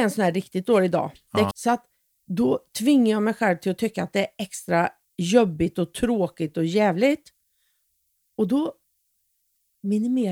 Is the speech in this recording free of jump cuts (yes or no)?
no